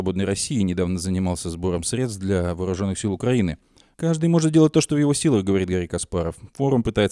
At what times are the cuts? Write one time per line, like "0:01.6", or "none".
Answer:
0:03.9

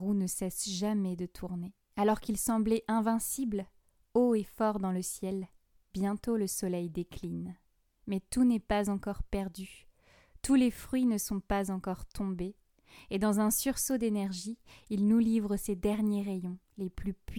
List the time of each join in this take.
none

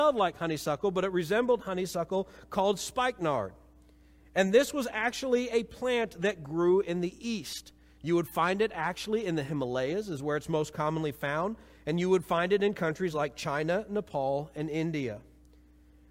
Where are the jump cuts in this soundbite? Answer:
none

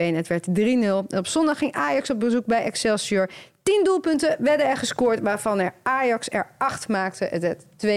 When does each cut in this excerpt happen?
none

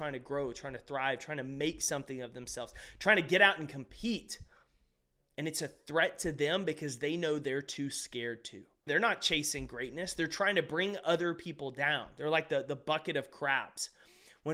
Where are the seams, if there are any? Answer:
0:08.9

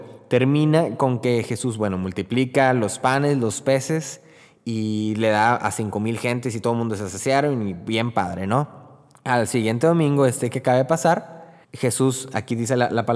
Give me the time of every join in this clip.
0:11.6

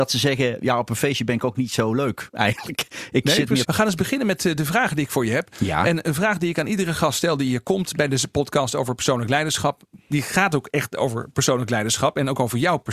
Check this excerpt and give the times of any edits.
0:03.6

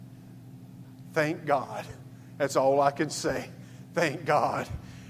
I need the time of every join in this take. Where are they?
none

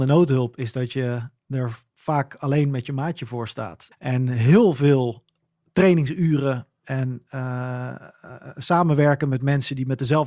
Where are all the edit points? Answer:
0:03.9

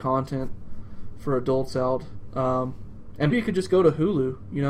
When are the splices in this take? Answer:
0:03.3

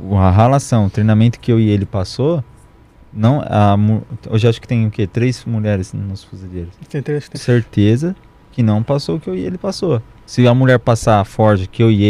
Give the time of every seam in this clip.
0:07.3
0:10.3

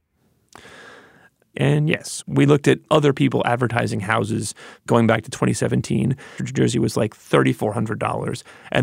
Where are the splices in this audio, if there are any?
0:01.5
0:06.4

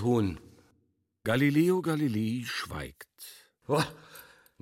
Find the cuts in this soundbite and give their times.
0:03.6

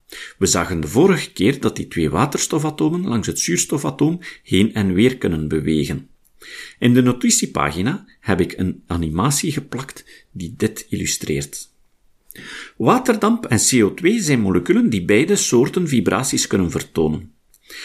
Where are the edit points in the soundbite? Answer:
none

